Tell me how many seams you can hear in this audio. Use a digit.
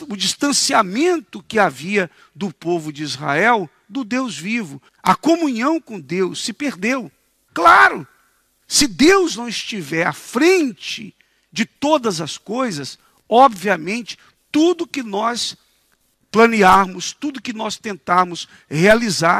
2